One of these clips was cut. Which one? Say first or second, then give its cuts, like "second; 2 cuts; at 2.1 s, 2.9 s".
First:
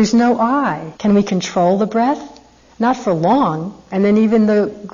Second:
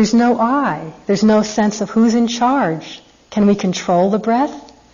first; 2 cuts; at 0.9 s, 3.9 s